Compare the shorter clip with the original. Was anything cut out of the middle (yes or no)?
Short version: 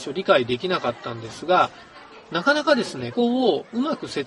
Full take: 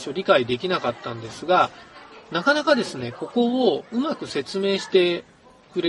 yes